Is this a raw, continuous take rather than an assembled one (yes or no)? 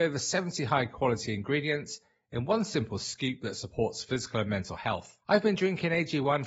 no